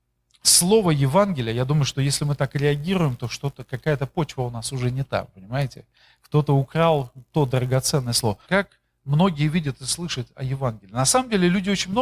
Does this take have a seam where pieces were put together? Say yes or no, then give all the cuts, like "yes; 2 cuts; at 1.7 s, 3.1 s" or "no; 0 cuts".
yes; 1 cut; at 8.4 s